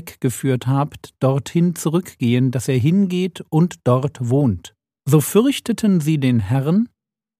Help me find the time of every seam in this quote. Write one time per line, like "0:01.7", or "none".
0:05.0